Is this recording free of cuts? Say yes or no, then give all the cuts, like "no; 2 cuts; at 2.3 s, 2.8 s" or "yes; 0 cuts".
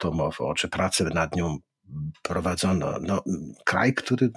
yes; 0 cuts